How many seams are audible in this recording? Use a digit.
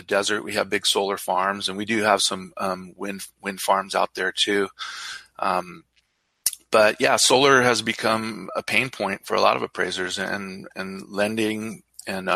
0